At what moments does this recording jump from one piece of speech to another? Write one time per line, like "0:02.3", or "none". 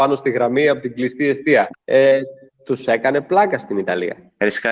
0:01.7